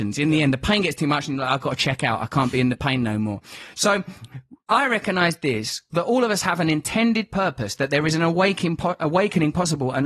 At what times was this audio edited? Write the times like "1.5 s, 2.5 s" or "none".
none